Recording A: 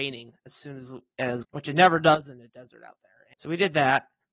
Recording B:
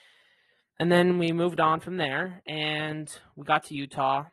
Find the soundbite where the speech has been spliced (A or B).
A